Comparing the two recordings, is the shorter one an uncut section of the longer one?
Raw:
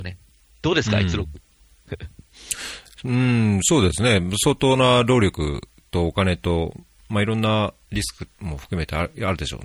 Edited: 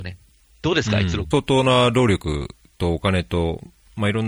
no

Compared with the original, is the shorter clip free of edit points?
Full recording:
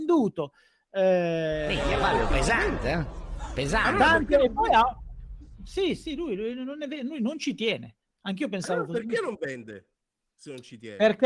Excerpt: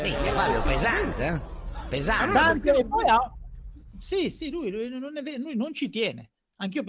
yes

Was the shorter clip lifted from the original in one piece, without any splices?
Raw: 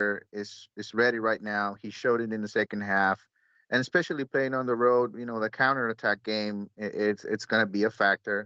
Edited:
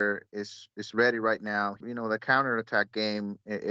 no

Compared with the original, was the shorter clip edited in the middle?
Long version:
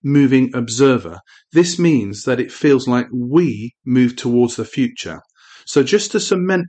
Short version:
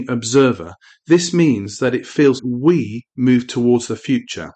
yes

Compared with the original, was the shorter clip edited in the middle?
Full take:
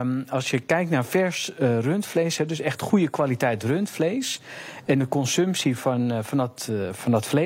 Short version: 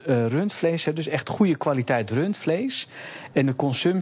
no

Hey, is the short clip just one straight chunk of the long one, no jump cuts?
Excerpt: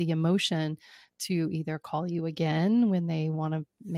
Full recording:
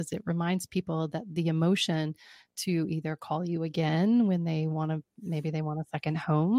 yes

